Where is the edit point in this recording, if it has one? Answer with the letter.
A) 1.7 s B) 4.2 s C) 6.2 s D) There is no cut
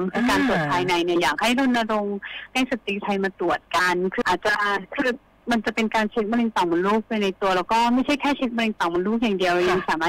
B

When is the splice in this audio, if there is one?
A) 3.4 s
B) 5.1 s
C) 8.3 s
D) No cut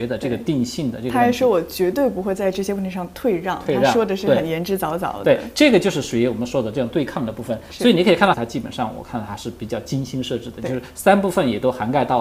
C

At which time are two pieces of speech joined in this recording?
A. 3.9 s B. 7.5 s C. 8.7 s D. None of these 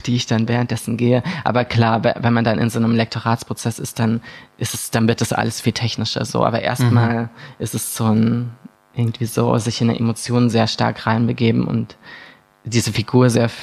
C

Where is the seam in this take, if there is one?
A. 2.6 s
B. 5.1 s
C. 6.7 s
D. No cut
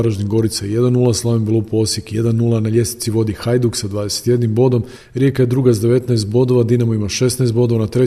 D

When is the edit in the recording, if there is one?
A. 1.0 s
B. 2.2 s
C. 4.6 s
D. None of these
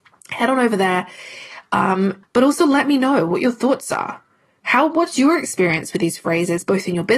B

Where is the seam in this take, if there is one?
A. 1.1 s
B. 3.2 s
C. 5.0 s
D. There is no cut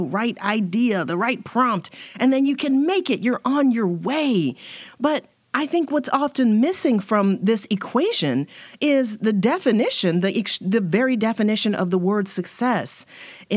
D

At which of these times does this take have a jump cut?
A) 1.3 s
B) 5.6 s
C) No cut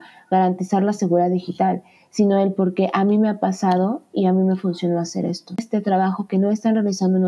C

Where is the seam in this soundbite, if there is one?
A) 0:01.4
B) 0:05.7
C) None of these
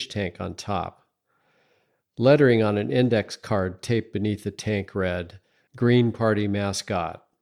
B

